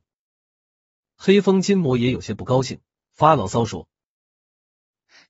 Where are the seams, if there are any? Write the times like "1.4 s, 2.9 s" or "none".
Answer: none